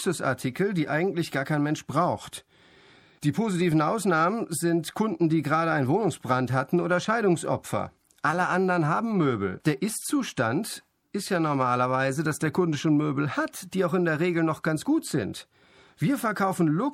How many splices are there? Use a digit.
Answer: 1